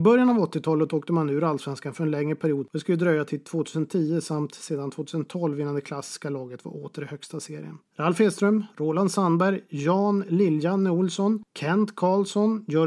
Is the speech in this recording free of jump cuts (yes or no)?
no